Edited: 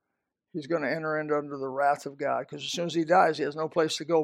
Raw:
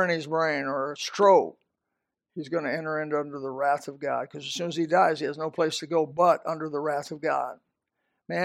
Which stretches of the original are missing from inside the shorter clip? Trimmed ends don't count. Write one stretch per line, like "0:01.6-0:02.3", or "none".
none